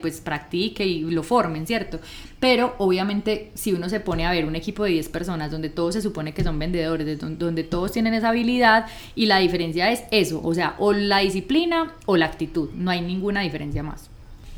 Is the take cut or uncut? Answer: uncut